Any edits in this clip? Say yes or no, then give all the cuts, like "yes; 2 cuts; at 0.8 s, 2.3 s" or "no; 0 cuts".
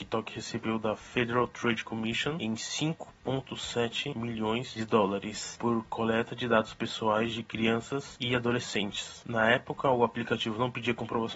no; 0 cuts